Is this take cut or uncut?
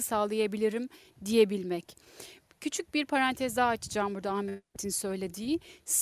uncut